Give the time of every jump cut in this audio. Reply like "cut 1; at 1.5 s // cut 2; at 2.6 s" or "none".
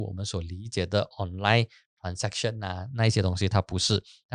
none